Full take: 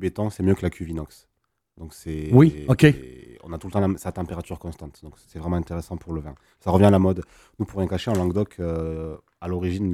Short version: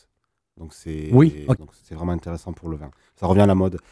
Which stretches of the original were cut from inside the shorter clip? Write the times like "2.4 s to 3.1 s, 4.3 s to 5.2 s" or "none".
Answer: 2.8 s to 5.0 s